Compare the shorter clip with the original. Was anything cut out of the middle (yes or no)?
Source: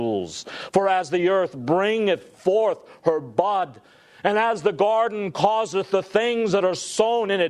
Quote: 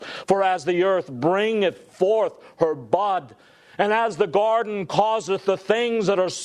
no